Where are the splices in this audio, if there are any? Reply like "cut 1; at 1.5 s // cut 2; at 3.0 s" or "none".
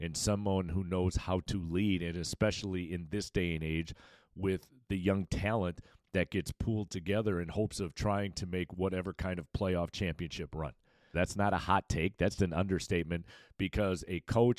cut 1; at 11.1 s // cut 2; at 12.4 s